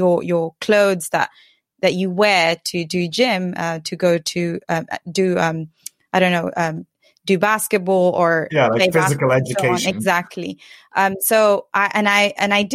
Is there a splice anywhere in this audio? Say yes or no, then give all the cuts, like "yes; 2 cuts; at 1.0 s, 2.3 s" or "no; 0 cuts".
no; 0 cuts